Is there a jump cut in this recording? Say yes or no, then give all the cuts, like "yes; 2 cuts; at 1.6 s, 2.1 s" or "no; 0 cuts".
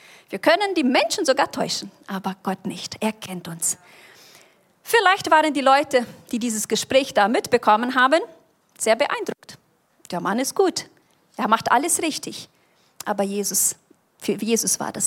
no; 0 cuts